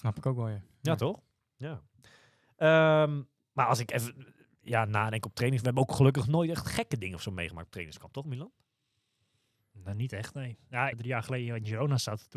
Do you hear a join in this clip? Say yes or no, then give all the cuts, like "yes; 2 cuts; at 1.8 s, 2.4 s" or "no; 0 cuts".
yes; 1 cut; at 10.9 s